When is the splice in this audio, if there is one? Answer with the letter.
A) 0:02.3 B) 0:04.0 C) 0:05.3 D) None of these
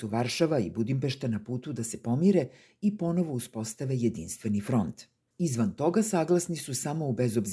C